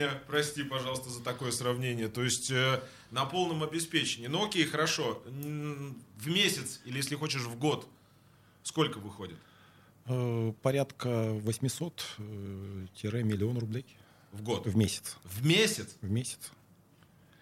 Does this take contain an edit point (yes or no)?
no